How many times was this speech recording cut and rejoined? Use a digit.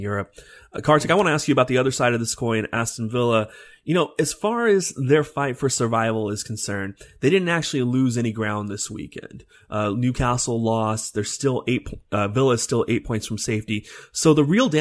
0